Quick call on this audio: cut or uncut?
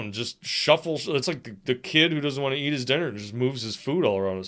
uncut